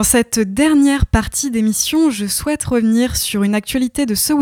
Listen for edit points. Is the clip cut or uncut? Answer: uncut